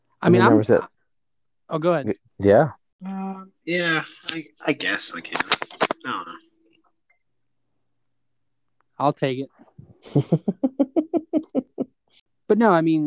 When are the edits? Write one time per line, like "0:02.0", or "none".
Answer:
0:02.3